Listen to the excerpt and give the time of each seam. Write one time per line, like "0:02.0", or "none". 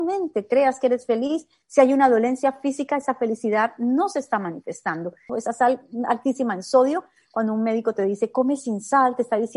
0:05.3